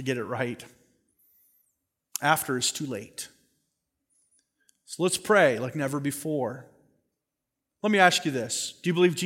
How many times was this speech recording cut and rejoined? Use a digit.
0